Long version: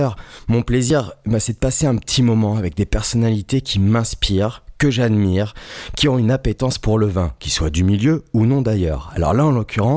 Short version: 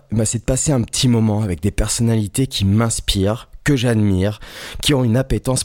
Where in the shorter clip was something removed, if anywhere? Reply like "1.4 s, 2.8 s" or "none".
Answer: none

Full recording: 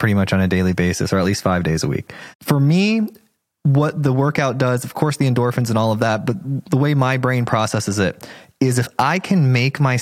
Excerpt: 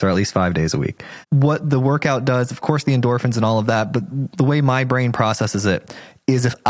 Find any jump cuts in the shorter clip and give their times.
1.3 s

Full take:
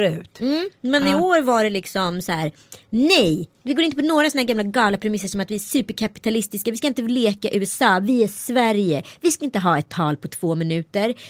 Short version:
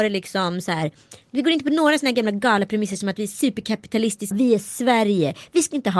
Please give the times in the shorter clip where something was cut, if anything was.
1.2 s, 4.3 s

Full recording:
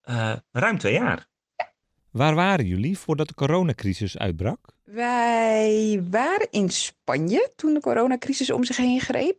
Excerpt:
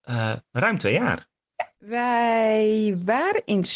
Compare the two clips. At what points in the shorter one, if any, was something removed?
1.8 s

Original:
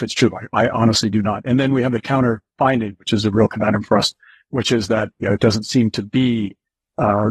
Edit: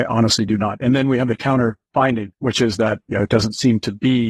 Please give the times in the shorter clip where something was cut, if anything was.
2.3 s

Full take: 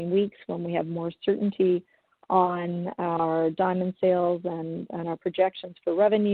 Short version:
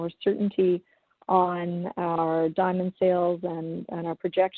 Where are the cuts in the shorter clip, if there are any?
none

